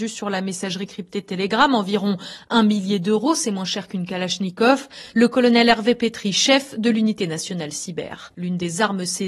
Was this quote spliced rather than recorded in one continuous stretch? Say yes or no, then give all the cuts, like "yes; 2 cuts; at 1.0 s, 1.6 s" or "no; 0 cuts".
yes; 2 cuts; at 5.1 s, 8.3 s